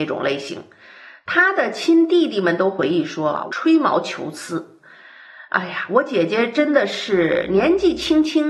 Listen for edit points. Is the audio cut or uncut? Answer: cut